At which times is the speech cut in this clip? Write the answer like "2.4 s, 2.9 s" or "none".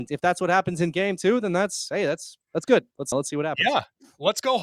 3.1 s